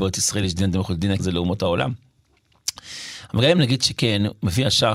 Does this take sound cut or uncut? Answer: cut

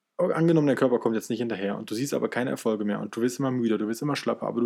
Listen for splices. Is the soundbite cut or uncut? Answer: uncut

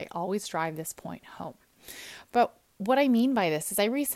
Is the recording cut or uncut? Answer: uncut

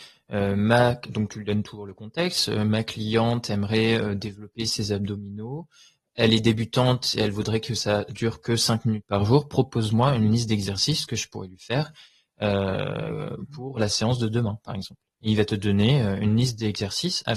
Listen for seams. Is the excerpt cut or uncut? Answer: uncut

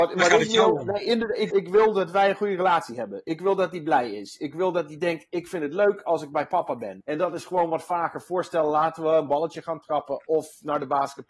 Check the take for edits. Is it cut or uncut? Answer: cut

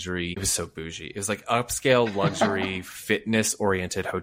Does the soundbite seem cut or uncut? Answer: uncut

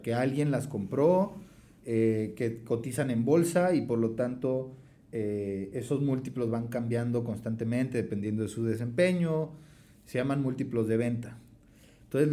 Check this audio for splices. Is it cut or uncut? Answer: uncut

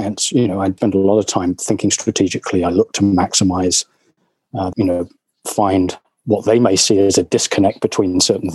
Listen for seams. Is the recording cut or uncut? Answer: cut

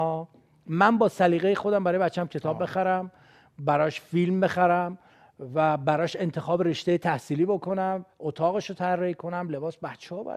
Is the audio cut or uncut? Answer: uncut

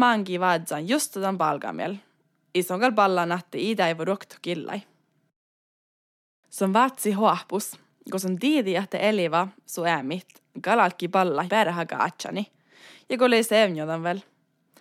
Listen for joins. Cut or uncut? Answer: cut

